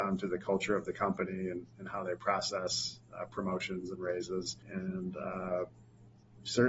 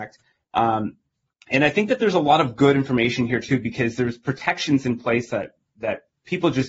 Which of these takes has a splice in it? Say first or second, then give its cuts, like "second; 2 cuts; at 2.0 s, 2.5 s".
first; 1 cut; at 4.6 s